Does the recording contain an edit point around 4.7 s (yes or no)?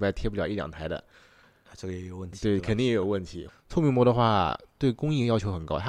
no